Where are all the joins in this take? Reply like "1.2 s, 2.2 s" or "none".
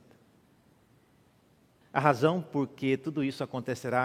1.8 s